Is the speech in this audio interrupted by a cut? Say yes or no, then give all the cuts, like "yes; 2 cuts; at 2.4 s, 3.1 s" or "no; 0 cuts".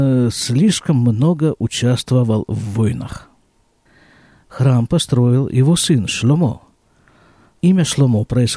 no; 0 cuts